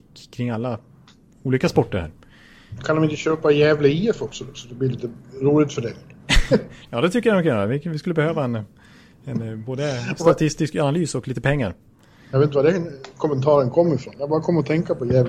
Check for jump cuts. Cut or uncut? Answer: uncut